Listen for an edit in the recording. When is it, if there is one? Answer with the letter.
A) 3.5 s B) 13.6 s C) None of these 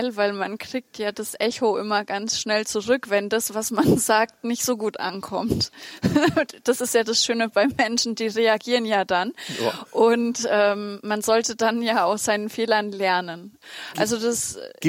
B